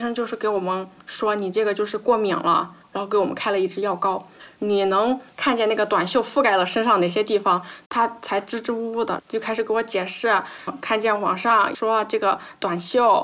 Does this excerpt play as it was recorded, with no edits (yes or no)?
no